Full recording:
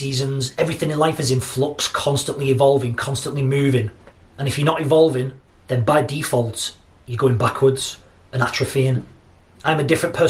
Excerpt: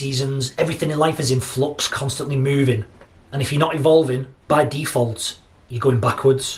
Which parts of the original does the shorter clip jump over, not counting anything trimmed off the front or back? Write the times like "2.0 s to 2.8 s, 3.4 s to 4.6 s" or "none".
1.9 s to 3.0 s, 5.5 s to 5.9 s

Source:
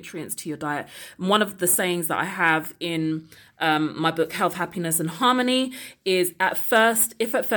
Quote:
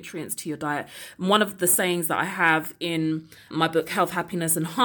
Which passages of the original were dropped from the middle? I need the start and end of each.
3.5 s to 3.9 s

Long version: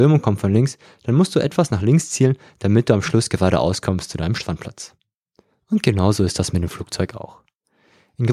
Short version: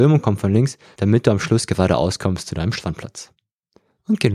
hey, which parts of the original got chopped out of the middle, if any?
1.0 s to 2.6 s

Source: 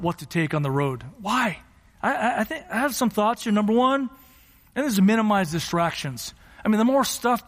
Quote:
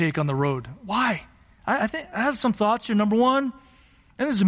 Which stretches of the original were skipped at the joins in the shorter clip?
2.1 s to 2.3 s

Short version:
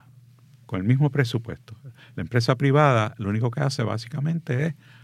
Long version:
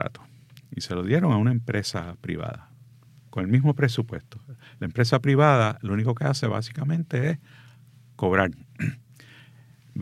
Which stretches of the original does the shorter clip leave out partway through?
none

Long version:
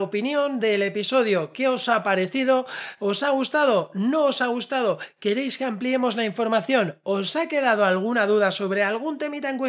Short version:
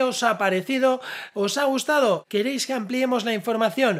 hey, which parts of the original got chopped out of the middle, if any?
3.9 s to 5.1 s

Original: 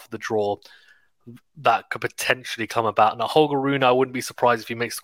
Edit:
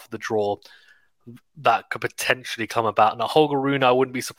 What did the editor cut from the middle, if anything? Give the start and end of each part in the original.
none

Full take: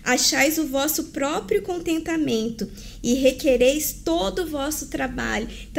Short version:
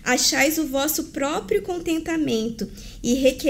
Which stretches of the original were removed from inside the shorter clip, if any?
none

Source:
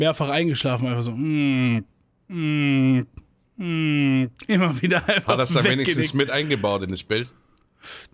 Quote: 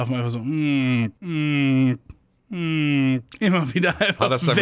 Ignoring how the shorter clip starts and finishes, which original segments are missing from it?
1.9 s to 2.2 s

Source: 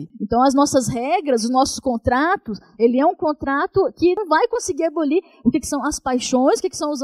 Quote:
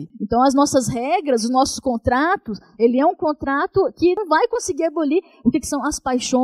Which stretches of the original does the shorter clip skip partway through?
none

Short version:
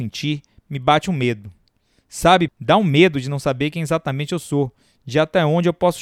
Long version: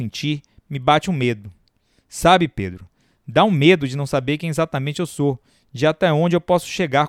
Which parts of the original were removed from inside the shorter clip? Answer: 2.5 s to 3.2 s

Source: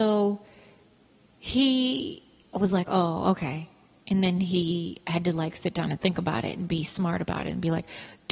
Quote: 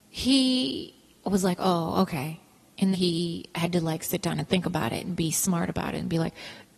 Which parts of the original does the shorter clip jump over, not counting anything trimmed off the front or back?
4.2 s to 4.4 s

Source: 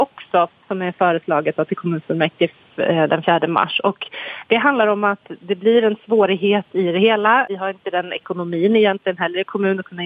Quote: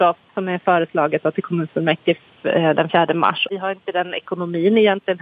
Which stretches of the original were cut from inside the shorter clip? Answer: 3.8 s to 7.5 s

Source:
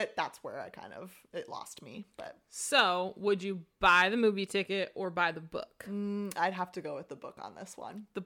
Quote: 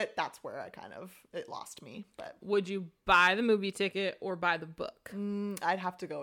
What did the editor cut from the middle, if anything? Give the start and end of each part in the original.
2.4 s to 3.1 s

